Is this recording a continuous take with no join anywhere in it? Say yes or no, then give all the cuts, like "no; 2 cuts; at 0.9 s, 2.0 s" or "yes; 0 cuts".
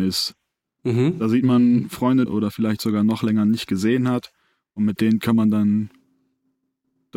no; 1 cut; at 2.3 s